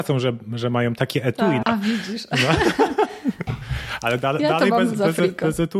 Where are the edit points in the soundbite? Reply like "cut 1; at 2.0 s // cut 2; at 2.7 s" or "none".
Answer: cut 1; at 1.6 s

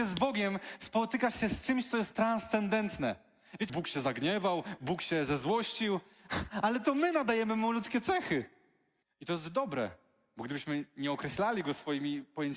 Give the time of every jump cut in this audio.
cut 1; at 3.7 s // cut 2; at 4.8 s // cut 3; at 9.0 s

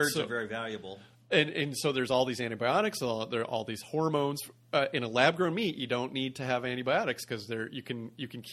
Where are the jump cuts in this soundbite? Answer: none

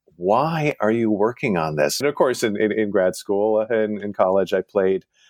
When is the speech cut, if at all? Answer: cut 1; at 2.0 s

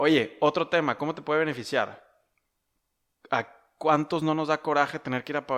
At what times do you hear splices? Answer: none

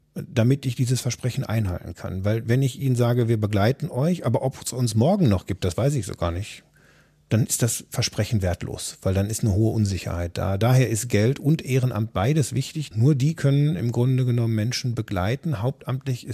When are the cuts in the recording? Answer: cut 1; at 12.9 s

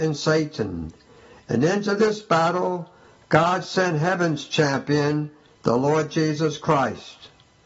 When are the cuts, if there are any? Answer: none

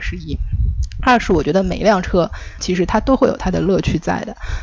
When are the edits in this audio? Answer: cut 1; at 2.6 s

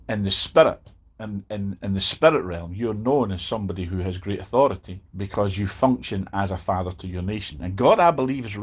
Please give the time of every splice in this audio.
cut 1; at 1.8 s // cut 2; at 5.1 s

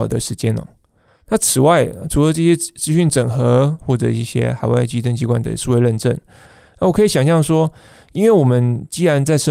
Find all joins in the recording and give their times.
none

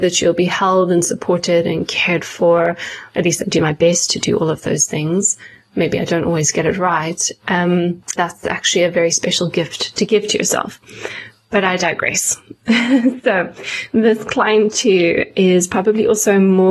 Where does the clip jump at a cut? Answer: cut 1; at 8.2 s

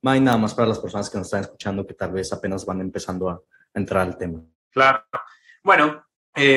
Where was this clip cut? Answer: none

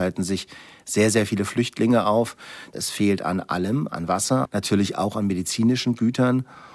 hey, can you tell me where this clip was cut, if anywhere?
cut 1; at 4.5 s

